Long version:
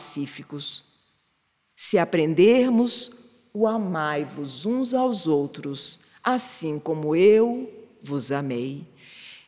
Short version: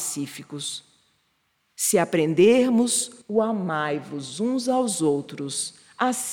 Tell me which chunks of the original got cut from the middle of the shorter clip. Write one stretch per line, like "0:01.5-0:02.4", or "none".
0:03.2-0:03.5